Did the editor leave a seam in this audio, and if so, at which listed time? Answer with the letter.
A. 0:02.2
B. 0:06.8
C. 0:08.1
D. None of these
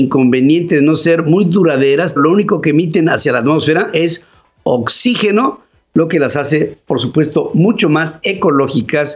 A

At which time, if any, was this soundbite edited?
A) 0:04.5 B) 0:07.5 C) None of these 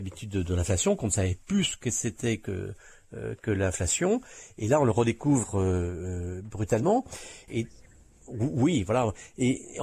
B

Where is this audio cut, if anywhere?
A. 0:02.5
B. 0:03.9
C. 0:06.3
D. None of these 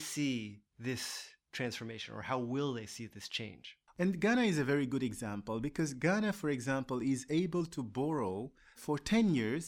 B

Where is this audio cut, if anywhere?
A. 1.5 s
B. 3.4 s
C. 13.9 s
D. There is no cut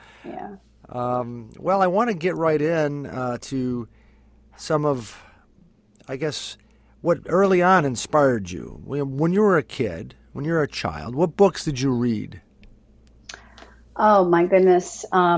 D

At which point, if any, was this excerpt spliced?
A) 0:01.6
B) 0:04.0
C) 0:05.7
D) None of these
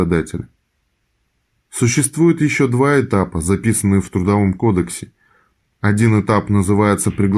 C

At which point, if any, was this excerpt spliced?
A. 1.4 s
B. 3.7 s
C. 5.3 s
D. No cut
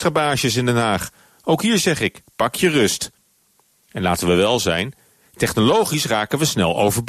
D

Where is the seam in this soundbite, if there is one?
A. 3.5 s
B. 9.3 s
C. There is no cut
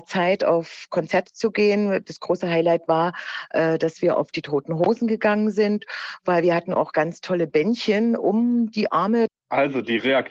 B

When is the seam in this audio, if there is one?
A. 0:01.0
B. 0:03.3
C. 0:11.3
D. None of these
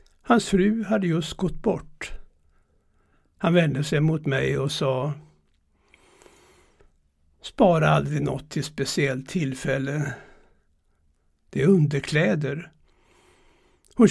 C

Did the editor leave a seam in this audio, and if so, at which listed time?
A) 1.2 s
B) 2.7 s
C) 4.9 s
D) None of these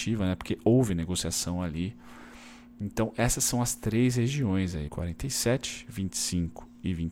C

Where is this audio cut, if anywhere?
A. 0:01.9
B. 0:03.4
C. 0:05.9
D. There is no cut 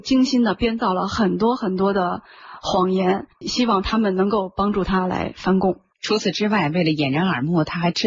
B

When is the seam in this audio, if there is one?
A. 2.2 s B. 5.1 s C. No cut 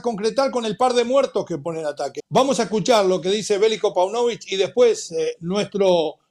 A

